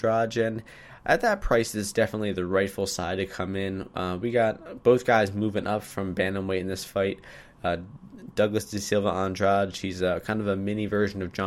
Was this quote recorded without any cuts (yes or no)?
yes